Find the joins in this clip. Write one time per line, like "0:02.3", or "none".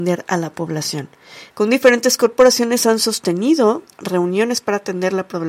0:01.5